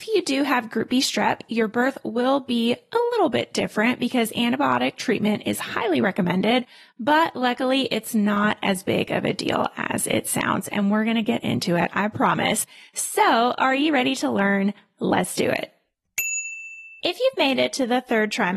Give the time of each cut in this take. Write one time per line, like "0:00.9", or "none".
0:17.0